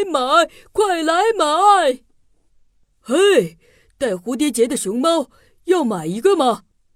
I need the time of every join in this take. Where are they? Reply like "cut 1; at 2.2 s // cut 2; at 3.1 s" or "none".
none